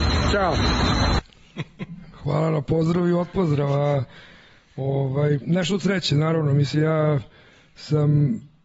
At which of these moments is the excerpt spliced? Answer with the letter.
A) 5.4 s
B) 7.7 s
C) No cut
C